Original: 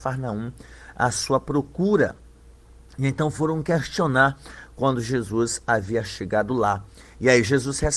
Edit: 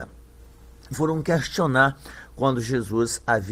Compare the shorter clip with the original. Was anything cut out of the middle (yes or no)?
yes